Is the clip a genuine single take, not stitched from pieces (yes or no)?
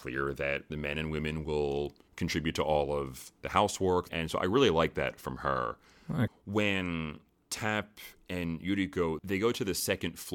no